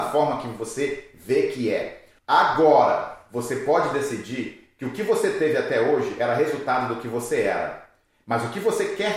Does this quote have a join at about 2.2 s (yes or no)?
yes